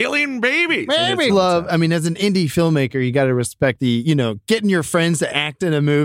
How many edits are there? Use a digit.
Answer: 2